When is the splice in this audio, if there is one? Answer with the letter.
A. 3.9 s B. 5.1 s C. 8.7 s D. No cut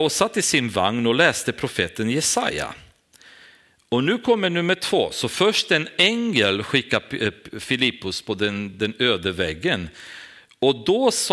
D